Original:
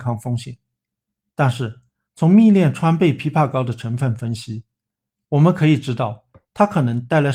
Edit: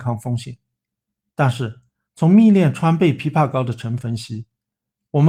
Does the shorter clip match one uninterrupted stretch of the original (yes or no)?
no